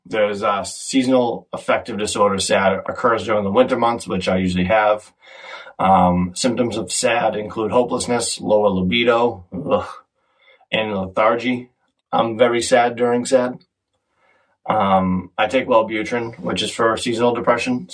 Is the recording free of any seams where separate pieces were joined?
no; 2 cuts; at 2.8 s, 12.0 s

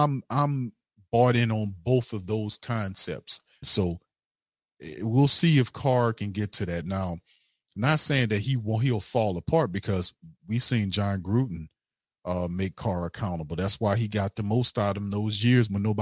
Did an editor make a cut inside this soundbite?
yes; 1 cut; at 3.6 s

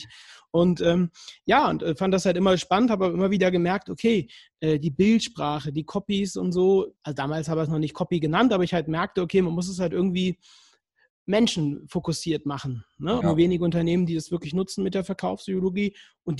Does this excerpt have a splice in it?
yes; 2 cuts; at 7.0 s, 13.2 s

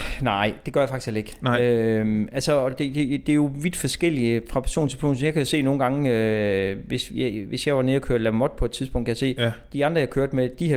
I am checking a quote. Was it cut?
no; 0 cuts

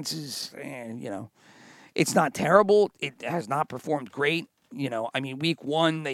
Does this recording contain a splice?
no; 0 cuts

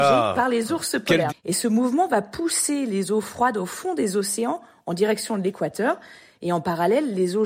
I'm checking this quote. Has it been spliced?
yes; 1 cut; at 1.3 s

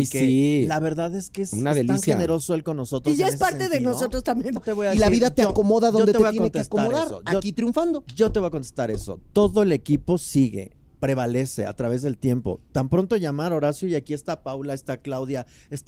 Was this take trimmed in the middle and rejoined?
yes; 1 cut; at 4.6 s

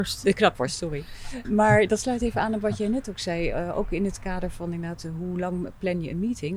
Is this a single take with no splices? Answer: no; 1 cut; at 1.4 s

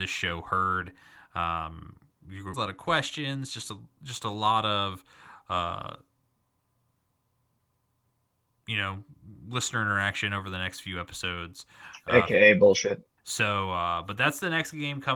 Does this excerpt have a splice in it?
yes; 2 cuts; at 2.5 s, 13.2 s

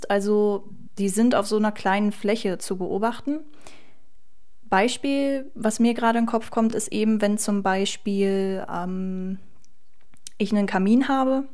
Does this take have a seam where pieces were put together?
no; 0 cuts

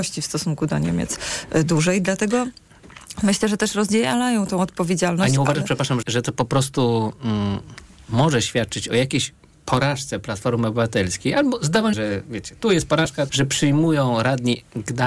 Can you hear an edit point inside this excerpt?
yes; 3 cuts; at 6.0 s, 11.9 s, 13.3 s

